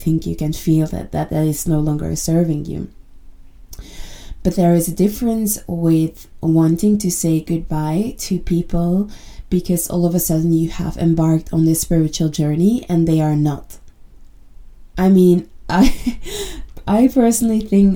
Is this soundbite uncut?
yes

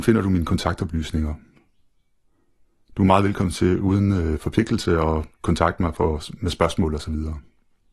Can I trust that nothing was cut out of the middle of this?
yes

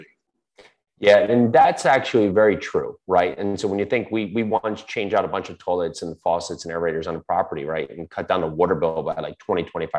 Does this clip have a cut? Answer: no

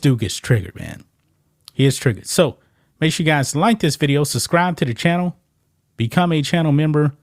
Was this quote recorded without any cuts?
yes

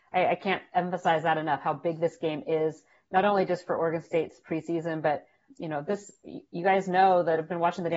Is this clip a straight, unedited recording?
no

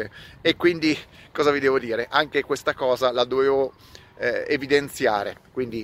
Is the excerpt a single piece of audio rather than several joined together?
yes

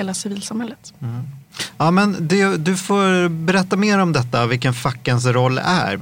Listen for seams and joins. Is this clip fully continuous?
yes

